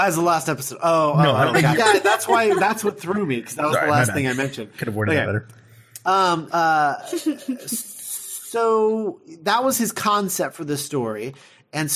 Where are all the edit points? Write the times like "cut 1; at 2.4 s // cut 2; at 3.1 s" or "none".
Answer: cut 1; at 1.7 s // cut 2; at 6.5 s